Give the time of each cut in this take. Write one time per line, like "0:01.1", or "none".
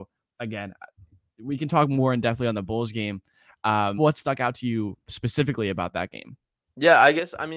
0:04.0
0:05.0